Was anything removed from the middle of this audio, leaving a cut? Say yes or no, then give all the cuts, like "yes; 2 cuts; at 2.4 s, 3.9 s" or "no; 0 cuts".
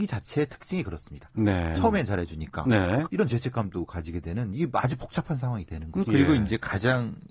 yes; 3 cuts; at 1.8 s, 3.1 s, 6.1 s